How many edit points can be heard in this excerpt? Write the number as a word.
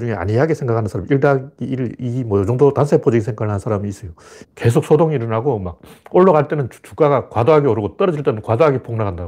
one